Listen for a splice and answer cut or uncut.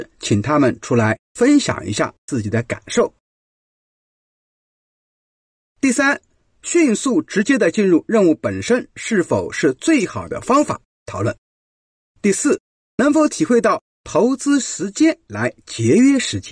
uncut